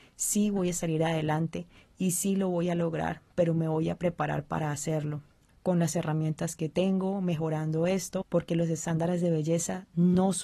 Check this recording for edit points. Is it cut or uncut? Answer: cut